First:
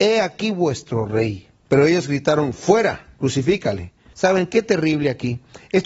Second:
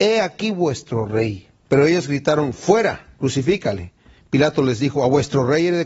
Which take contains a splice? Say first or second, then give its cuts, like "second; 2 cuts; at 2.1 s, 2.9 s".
first; 1 cut; at 4.1 s